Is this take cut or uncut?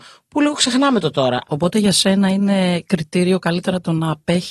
cut